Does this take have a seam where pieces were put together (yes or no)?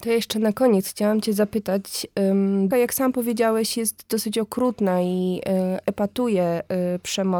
yes